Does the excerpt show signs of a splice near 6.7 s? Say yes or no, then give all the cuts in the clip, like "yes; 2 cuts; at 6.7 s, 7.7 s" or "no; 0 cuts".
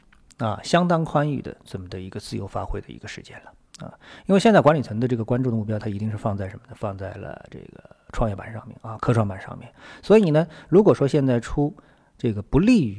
no; 0 cuts